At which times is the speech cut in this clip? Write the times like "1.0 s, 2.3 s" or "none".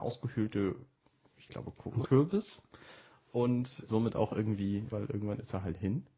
2.1 s, 3.9 s, 4.9 s